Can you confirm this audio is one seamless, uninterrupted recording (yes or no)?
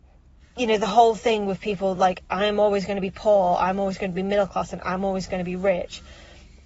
yes